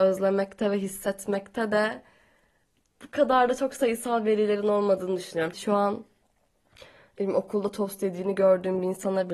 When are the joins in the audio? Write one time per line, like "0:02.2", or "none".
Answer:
0:05.5